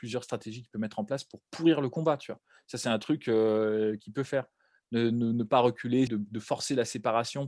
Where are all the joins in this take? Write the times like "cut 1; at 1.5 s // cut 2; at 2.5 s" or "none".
cut 1; at 6.1 s